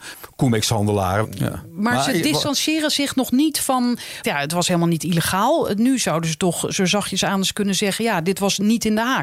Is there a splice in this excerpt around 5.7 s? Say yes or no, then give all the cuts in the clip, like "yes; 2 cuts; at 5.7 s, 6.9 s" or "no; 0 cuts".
no; 2 cuts; at 1.2 s, 4.2 s